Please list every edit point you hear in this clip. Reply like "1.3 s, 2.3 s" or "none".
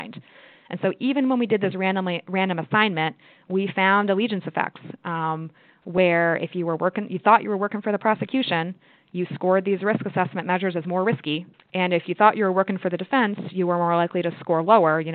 11.5 s